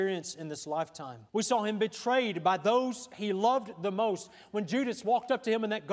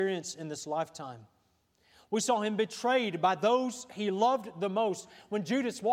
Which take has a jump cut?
first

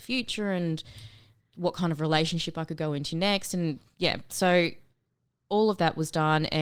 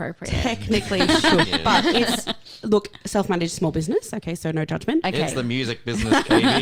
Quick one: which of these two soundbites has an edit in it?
second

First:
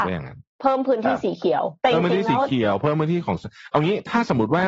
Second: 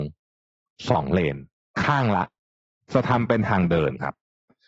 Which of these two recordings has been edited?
first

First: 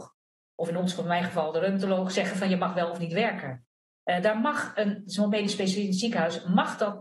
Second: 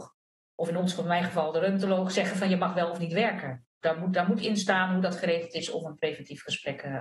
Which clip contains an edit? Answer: second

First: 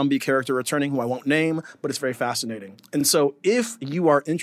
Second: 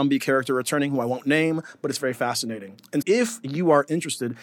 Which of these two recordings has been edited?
second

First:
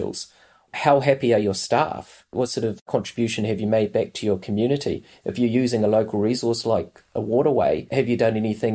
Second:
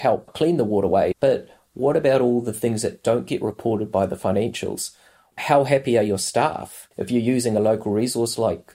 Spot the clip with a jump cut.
second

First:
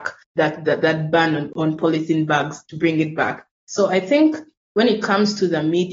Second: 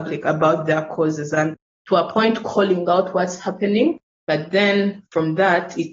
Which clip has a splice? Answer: second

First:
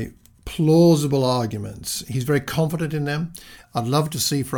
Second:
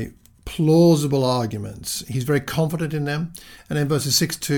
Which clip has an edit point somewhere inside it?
first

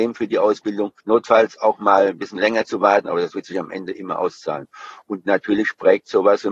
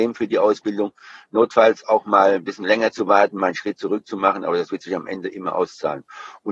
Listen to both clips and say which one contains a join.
first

